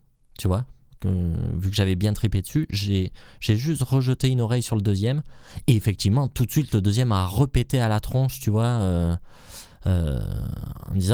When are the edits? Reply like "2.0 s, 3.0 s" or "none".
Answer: none